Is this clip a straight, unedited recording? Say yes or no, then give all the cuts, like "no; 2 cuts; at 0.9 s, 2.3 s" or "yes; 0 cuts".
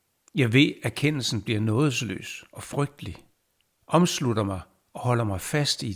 no; 1 cut; at 3.8 s